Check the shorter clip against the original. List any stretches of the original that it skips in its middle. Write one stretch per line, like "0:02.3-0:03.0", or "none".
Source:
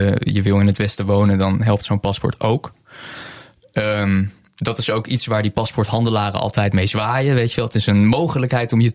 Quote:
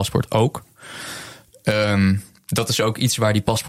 none

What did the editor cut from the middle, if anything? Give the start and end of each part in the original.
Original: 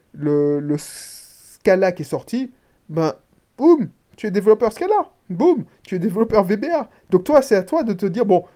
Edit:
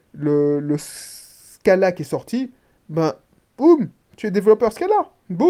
none

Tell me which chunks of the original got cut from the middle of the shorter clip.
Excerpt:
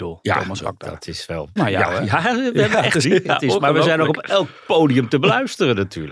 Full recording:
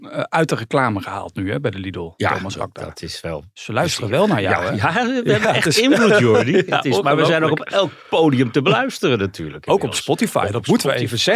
0:03.5-0:04.3
0:05.7-0:06.4

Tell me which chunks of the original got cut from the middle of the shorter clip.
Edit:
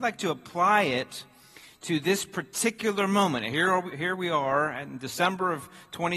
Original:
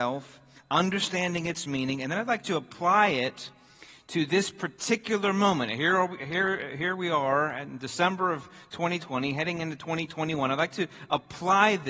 0:06.2-0:06.7

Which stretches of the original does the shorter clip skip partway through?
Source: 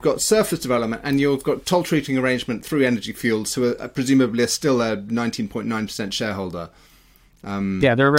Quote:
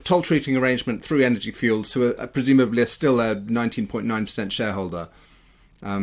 none

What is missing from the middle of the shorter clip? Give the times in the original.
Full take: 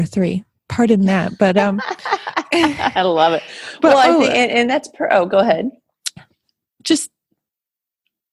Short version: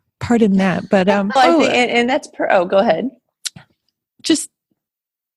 0:01.8-0:04.0

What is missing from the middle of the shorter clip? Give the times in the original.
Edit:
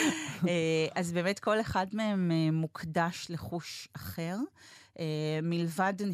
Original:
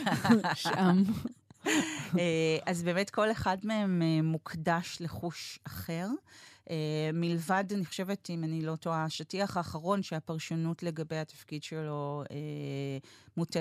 none

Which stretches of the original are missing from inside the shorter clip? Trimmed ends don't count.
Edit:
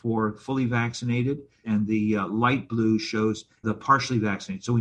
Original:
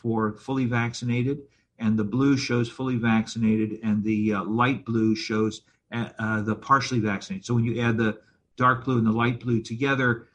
0:01.6-0:03.8
0:05.8-0:06.4

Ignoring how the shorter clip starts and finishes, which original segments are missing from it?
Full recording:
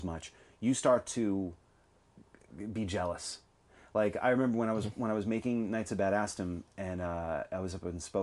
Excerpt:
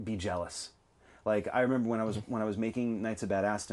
none

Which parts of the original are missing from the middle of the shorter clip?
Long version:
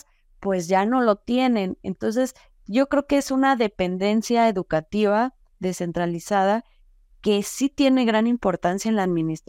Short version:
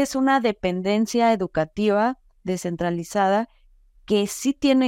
none

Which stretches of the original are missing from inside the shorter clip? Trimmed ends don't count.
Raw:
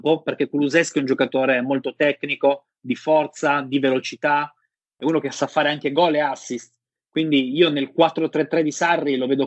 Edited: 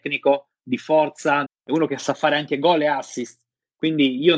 0:03.6-0:04.8

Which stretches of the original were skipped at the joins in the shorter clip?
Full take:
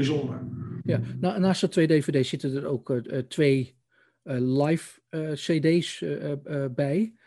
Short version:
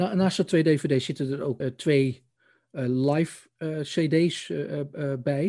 0:02.8-0:03.1

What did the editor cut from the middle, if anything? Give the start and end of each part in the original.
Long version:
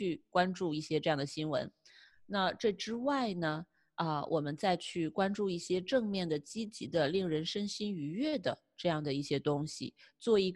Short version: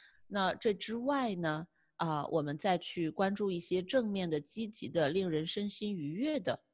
none

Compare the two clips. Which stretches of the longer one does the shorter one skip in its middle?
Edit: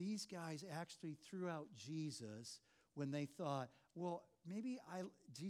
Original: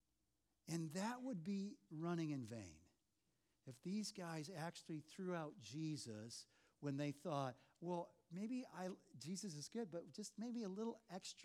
none

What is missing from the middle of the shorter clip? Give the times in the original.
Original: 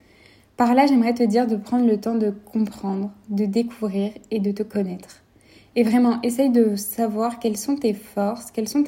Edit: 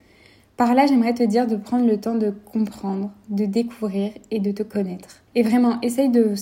0:05.3-0:05.7

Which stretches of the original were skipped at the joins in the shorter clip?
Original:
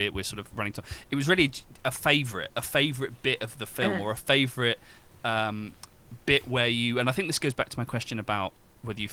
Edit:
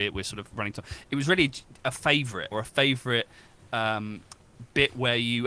0:02.5-0:04.0

